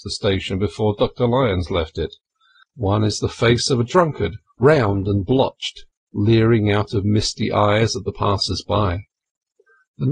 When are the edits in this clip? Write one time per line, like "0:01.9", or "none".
0:02.6